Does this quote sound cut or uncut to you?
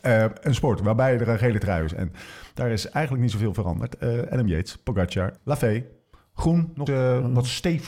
cut